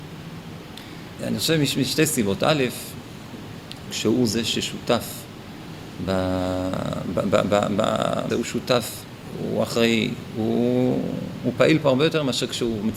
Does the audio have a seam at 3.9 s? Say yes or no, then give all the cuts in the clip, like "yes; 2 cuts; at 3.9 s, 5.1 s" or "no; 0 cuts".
yes; 3 cuts; at 1.2 s, 3.9 s, 8.3 s